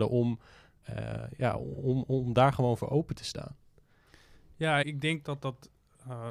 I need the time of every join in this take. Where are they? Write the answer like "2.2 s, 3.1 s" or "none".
4.8 s